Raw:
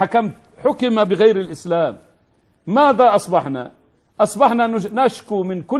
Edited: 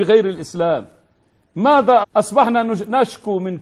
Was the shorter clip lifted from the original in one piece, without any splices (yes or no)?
no